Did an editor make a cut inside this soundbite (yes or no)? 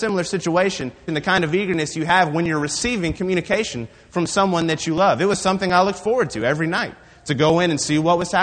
yes